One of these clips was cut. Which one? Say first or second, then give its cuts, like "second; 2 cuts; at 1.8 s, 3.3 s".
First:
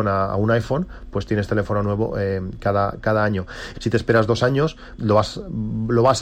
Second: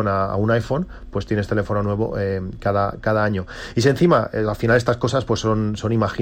first; 2 cuts; at 3.7 s, 5.0 s